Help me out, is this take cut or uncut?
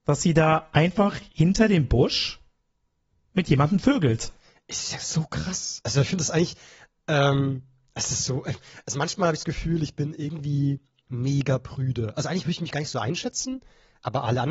uncut